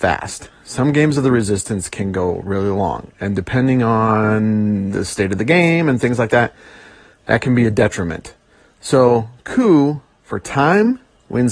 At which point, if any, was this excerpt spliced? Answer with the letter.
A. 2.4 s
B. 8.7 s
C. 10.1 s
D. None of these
D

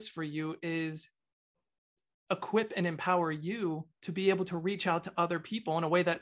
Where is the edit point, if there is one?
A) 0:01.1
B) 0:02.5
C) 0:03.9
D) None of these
C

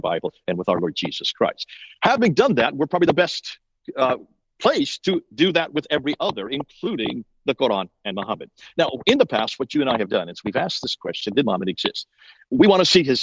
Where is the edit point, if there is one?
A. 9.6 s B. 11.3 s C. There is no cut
B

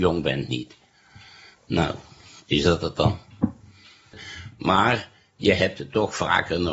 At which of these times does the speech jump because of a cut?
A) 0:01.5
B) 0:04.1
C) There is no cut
B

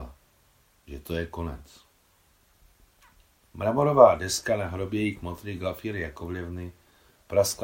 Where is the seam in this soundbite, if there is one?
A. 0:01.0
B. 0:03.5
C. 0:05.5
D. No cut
B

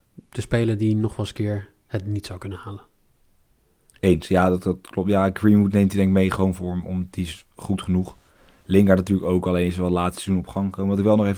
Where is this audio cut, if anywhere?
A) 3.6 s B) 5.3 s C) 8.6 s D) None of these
D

